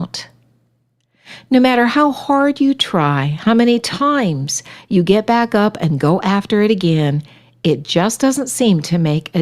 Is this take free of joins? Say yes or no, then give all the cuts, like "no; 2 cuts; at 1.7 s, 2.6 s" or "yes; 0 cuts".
yes; 0 cuts